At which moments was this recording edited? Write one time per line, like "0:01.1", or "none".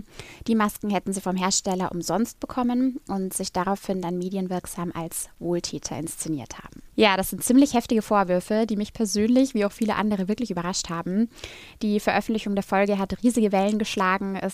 0:06.9